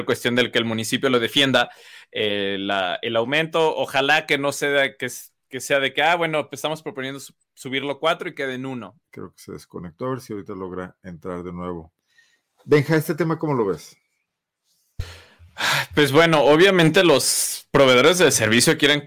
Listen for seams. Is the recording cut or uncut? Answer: cut